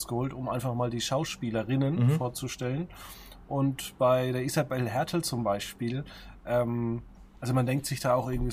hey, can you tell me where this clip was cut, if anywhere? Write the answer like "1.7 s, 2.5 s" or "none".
none